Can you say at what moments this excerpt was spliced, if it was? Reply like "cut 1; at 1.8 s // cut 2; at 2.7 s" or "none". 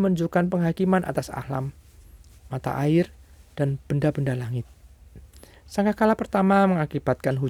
cut 1; at 2.4 s